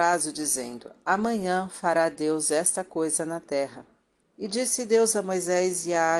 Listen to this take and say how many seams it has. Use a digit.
1